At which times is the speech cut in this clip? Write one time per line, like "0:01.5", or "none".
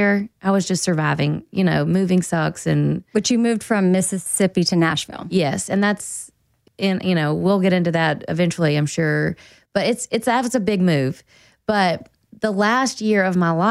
none